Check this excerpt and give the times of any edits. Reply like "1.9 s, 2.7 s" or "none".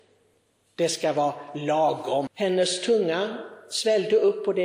2.3 s